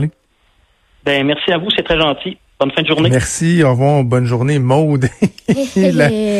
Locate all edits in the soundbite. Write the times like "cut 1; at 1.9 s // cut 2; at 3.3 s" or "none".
none